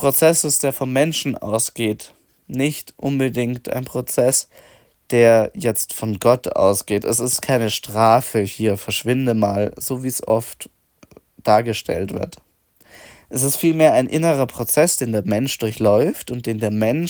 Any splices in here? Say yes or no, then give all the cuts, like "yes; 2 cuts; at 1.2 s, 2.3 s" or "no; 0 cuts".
no; 0 cuts